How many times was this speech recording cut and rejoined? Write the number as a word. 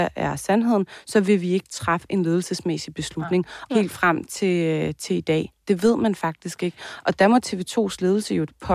one